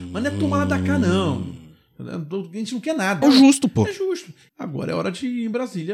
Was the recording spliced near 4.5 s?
yes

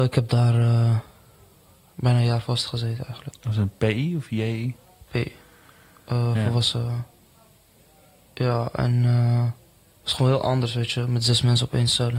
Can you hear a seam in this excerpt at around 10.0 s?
no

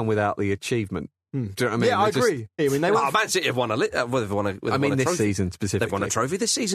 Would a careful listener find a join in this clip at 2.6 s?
yes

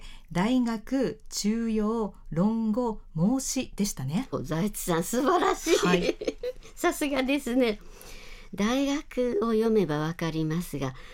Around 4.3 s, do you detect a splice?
yes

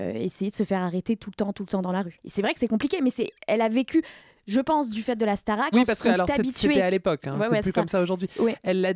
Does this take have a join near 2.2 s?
no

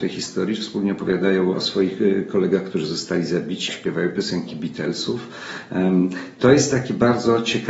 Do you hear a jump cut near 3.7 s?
yes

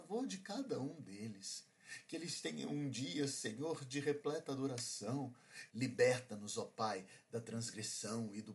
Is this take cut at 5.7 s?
yes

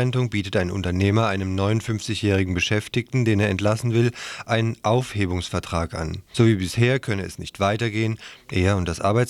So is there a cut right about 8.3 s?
yes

